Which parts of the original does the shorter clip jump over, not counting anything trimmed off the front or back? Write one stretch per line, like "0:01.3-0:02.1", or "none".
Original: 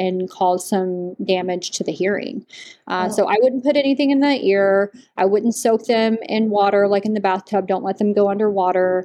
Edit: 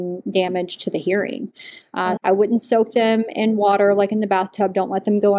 0:03.1-0:05.1